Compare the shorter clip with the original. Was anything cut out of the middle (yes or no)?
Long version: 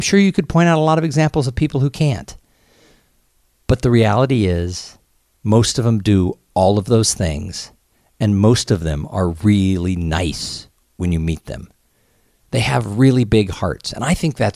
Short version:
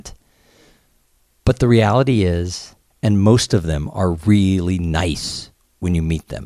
yes